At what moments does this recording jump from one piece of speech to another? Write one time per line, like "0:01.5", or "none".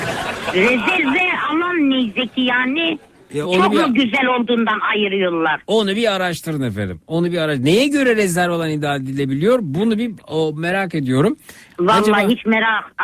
0:03.4